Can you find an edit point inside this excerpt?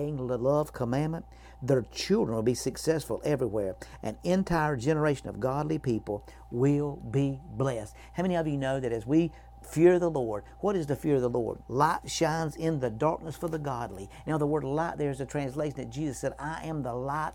yes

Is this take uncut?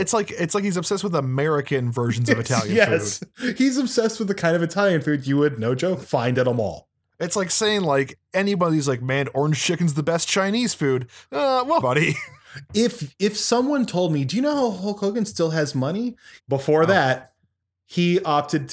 no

